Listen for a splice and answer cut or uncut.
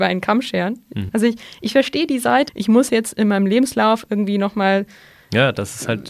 cut